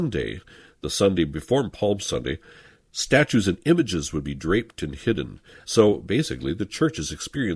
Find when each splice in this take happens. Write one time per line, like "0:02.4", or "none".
0:05.6